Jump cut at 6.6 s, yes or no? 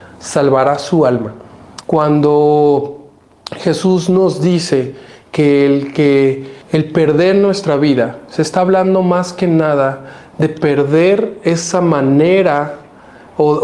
yes